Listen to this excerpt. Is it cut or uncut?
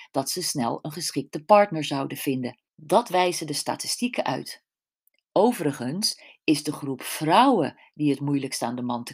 cut